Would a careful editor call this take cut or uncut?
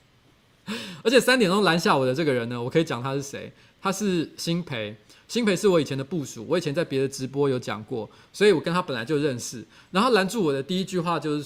uncut